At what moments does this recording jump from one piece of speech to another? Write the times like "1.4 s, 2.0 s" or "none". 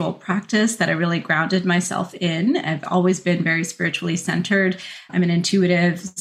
none